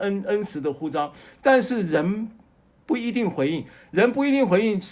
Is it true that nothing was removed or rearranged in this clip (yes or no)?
yes